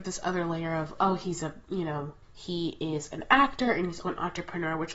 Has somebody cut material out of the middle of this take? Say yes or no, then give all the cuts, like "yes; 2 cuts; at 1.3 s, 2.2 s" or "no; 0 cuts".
yes; 2 cuts; at 2.2 s, 4.0 s